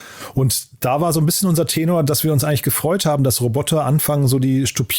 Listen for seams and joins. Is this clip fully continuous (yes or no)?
yes